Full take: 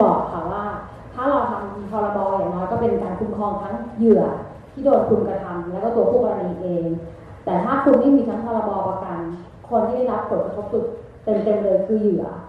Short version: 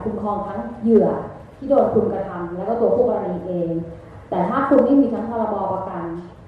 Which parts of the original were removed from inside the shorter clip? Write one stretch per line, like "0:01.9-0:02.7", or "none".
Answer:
none